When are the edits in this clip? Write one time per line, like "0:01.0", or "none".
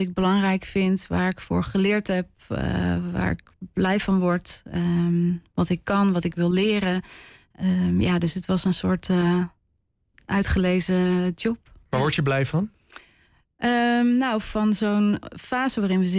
none